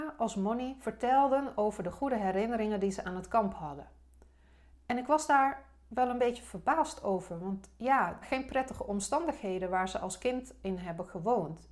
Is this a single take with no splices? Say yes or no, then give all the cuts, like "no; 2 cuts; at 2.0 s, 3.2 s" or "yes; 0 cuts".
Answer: no; 1 cut; at 8.2 s